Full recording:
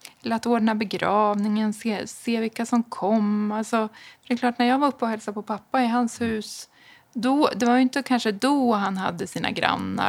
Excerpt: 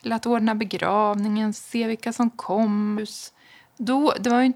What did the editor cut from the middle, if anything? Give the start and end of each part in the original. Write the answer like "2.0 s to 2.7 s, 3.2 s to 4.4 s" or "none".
1.7 s to 2.1 s, 3.5 s to 6.3 s